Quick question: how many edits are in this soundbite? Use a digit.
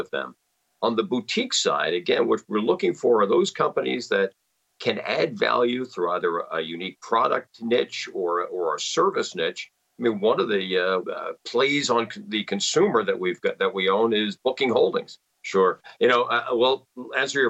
2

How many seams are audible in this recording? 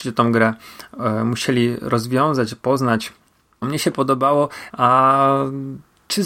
2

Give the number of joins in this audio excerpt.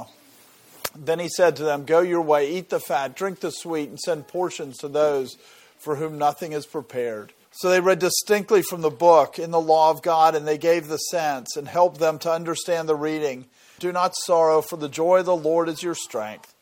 2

